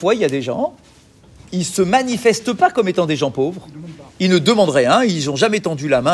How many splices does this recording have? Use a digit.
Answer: 0